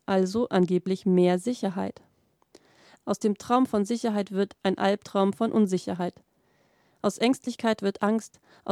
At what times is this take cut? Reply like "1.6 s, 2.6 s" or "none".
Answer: 3.0 s